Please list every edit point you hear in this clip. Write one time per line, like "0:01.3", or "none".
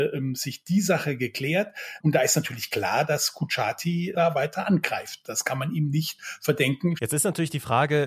0:02.0
0:07.0